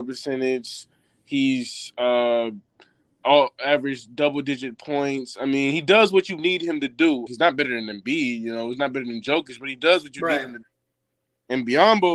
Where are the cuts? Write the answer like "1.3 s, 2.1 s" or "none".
7.3 s